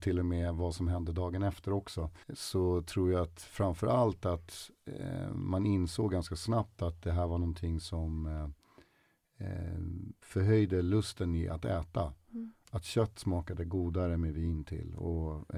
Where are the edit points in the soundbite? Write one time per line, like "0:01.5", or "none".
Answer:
0:02.2